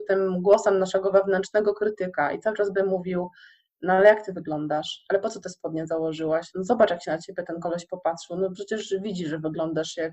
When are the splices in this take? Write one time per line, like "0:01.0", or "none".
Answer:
none